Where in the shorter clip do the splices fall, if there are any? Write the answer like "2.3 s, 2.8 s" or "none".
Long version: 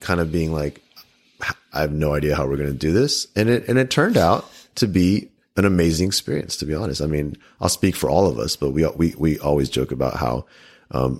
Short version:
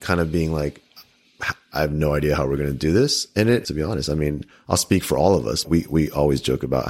3.6 s, 5.6 s